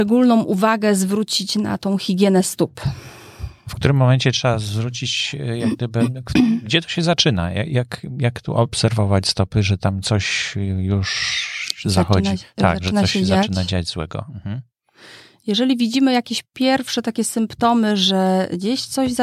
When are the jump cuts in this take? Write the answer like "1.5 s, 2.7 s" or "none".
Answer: none